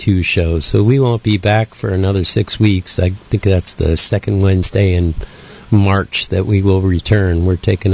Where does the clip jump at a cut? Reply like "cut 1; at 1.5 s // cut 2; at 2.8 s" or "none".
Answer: none